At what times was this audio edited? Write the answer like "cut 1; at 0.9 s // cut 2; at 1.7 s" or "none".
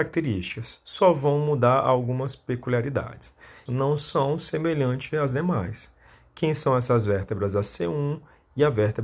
cut 1; at 3.7 s